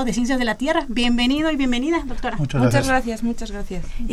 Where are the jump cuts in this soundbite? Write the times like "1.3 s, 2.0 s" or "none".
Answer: none